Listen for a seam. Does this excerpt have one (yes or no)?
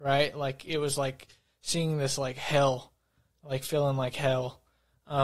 no